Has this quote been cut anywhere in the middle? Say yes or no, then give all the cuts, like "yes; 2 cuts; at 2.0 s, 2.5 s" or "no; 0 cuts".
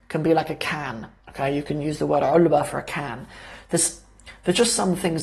yes; 1 cut; at 1.2 s